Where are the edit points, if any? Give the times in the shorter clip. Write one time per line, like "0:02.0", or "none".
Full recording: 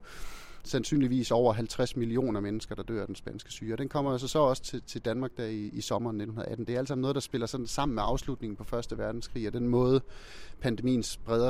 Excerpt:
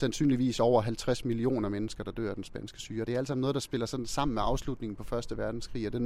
0:03.1